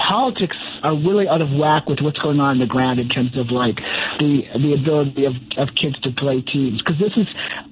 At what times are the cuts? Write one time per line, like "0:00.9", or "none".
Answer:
none